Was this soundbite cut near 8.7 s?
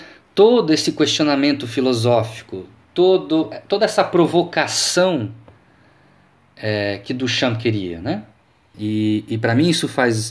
yes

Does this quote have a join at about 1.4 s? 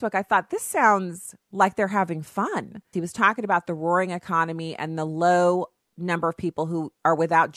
no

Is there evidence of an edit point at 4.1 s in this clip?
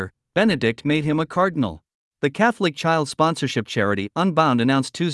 no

